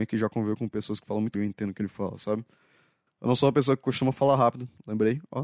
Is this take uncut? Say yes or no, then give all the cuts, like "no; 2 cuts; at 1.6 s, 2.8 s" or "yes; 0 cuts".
no; 2 cuts; at 1.3 s, 3.1 s